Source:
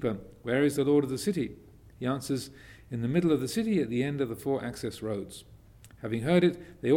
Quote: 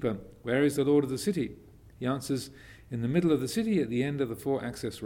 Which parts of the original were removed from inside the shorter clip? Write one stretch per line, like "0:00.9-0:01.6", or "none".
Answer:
none